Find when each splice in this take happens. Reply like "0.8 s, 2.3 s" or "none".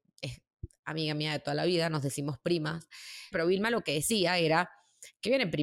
3.3 s

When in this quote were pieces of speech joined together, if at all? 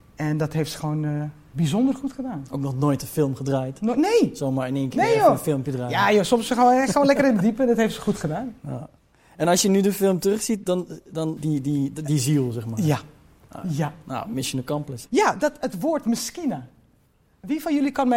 11.4 s, 15.1 s

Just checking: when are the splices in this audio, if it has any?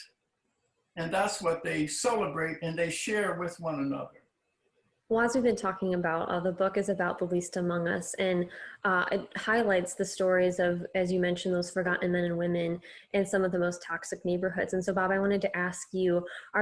none

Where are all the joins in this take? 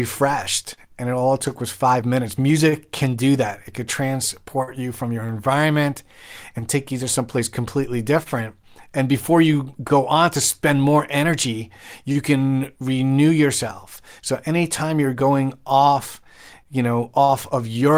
none

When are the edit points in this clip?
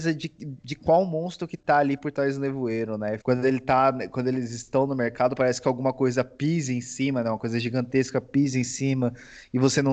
3.2 s

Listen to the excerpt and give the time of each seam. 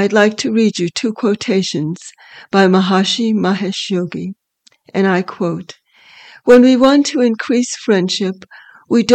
none

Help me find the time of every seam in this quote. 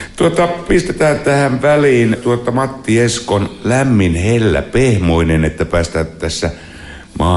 2.1 s

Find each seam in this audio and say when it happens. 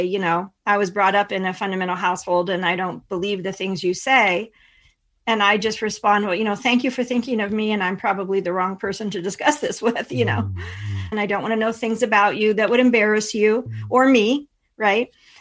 11.1 s

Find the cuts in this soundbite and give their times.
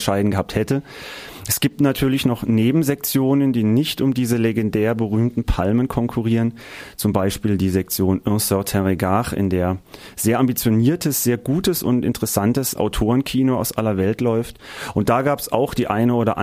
none

